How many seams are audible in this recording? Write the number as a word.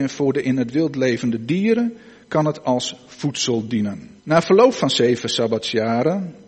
one